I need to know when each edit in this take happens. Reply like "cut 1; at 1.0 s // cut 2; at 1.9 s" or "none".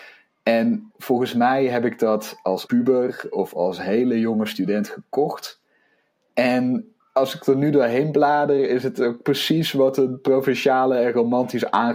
cut 1; at 0.9 s // cut 2; at 2.7 s // cut 3; at 7.0 s